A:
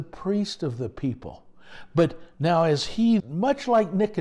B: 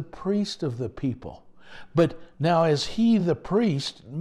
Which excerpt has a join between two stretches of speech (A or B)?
A